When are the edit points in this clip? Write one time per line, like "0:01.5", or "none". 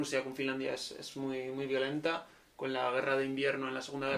none